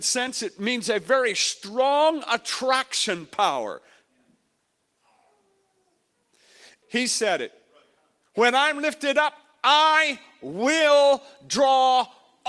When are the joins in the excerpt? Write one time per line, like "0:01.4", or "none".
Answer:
0:06.8